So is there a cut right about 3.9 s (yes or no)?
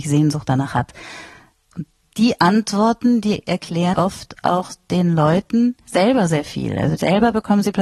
yes